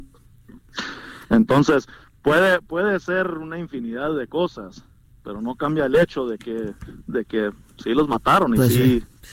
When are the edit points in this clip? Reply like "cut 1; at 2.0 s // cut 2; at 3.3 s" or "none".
cut 1; at 1.2 s